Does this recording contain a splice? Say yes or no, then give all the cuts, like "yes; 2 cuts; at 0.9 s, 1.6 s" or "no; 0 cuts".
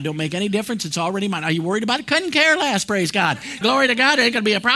yes; 1 cut; at 3.6 s